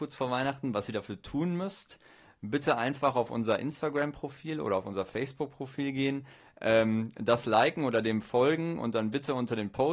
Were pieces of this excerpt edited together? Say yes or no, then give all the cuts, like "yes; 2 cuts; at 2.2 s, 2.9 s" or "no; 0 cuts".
no; 0 cuts